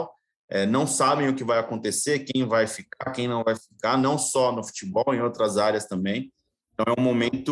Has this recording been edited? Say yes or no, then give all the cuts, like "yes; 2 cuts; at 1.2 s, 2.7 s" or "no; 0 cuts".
no; 0 cuts